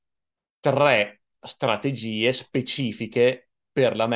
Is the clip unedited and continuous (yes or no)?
yes